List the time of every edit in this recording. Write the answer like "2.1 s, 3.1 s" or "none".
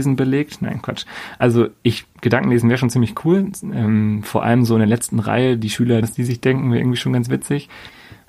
6.0 s